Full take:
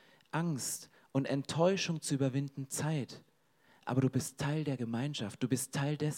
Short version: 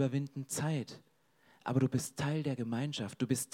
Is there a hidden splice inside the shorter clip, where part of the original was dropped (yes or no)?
no